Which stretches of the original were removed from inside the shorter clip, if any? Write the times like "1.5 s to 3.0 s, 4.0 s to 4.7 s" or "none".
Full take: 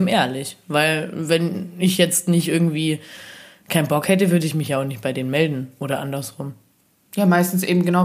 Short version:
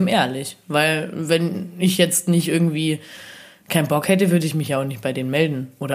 none